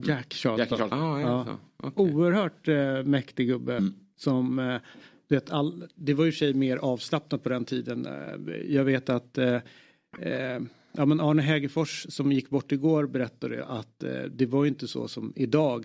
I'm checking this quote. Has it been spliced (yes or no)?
no